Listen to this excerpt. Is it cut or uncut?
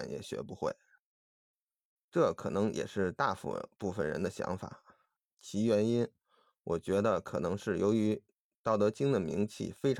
cut